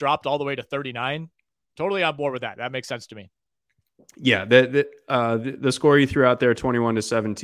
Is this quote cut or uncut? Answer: uncut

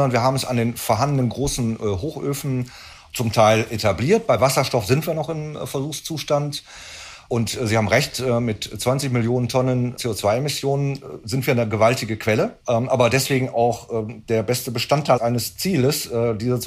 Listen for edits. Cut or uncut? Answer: cut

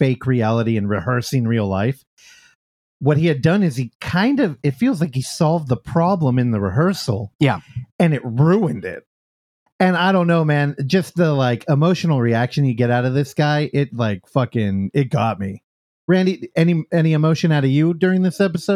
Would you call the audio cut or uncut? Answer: uncut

